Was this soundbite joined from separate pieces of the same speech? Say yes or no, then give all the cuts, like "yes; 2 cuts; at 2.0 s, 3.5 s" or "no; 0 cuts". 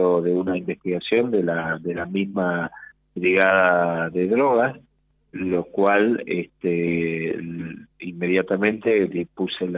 yes; 1 cut; at 5.3 s